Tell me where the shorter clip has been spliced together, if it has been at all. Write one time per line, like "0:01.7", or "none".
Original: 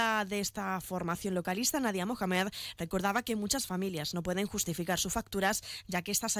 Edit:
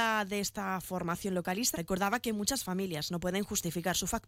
0:01.7